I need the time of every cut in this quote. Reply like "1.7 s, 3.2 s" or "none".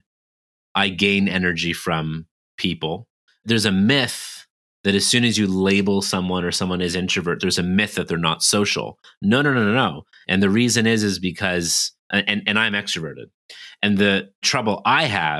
10.2 s